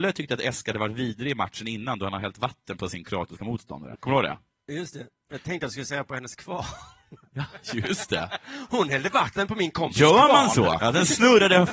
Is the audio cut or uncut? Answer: cut